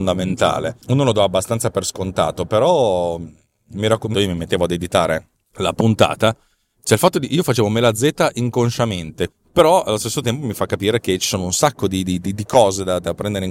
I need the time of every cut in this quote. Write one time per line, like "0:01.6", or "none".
0:04.1
0:09.3